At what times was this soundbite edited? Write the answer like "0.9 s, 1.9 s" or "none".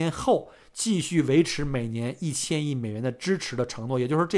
none

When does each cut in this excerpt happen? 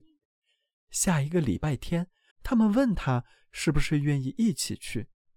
2.3 s

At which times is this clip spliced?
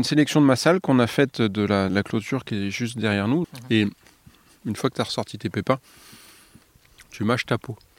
1.9 s, 3.4 s

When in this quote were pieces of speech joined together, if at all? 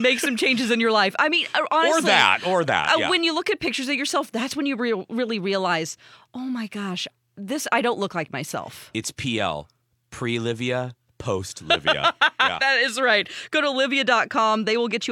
none

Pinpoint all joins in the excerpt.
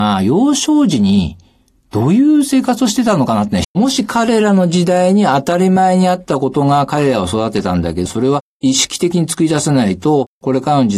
3.6 s, 8.0 s

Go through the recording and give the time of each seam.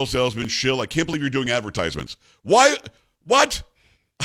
none

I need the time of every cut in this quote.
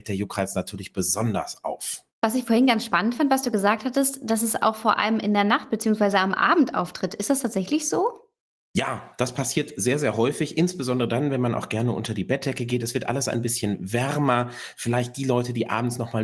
2.1 s

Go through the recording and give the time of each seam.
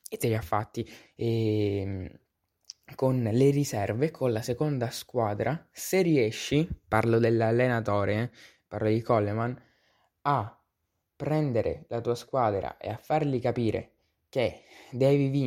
1.0 s

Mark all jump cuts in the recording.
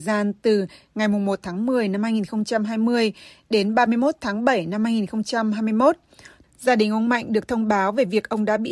6.4 s

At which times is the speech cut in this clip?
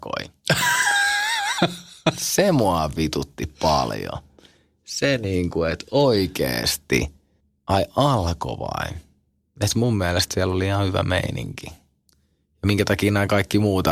none

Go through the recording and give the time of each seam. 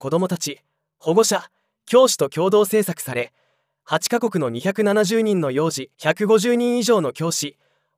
5.9 s

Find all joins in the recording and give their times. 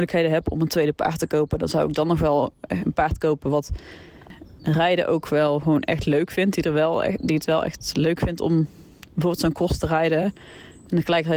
none

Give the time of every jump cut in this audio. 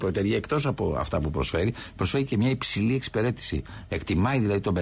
3.9 s

